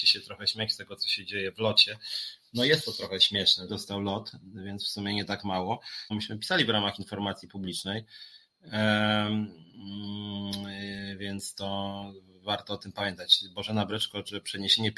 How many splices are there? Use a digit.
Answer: 2